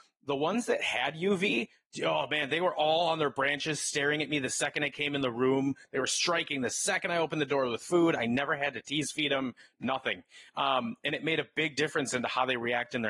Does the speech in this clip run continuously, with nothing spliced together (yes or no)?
yes